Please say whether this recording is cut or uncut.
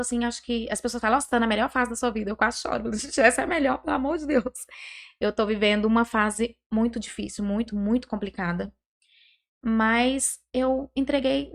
uncut